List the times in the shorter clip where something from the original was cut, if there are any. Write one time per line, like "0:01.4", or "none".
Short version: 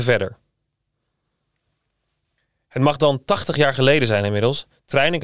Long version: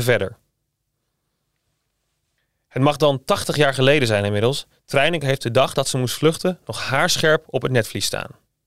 none

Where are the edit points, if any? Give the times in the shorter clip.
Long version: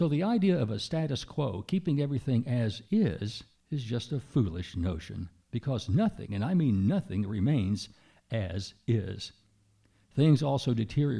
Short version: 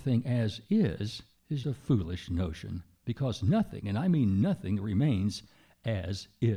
0:01.6

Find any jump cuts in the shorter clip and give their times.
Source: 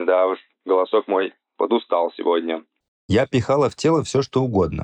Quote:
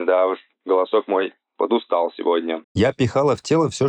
0:02.6

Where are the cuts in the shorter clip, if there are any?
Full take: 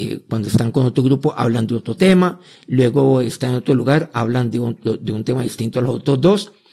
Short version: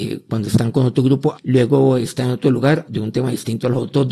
0:01.3
0:02.9

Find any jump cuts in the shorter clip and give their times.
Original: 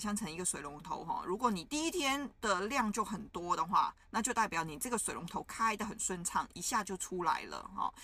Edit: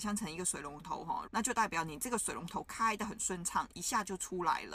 0:01.2

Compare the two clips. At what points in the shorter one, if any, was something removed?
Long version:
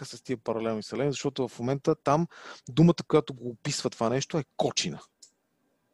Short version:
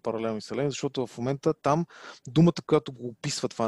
none

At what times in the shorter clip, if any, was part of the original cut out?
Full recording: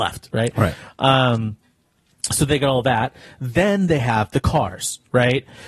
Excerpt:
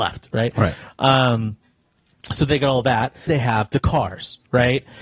0:03.3

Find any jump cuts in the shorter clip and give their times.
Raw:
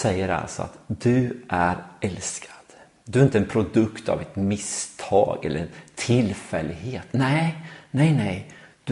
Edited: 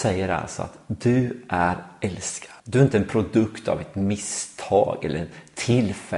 0:02.6

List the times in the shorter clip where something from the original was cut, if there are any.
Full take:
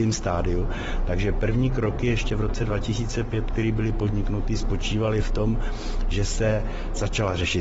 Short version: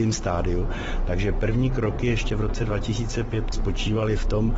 0:03.5

